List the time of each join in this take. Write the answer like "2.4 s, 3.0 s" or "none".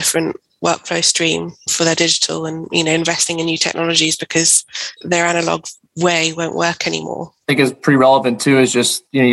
5.0 s